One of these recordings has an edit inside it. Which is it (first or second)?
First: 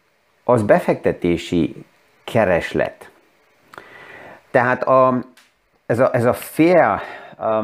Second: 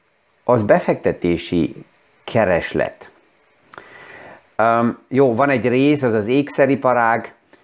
first